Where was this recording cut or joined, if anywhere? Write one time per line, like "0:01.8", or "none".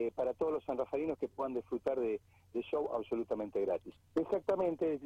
0:04.0